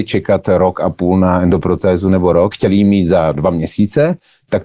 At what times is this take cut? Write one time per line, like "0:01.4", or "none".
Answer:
0:02.5